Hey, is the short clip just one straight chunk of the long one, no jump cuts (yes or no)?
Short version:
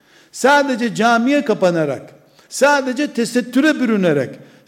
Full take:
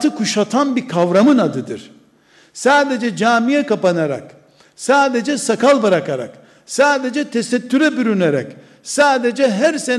no